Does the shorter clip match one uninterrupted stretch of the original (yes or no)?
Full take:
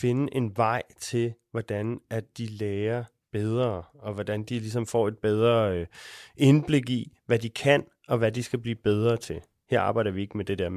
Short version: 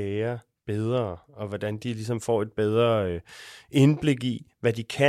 yes